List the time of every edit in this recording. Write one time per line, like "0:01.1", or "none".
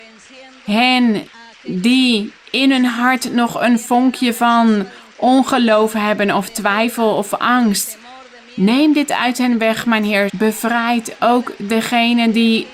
0:10.3